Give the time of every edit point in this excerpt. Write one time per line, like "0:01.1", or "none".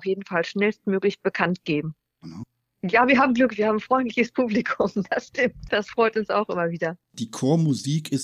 0:02.2